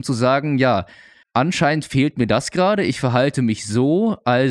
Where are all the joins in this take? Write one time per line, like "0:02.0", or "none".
0:01.2